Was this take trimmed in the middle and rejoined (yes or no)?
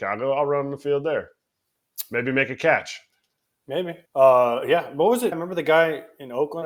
yes